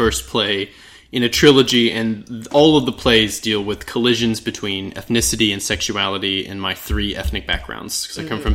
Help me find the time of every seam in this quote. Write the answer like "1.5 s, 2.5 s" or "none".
none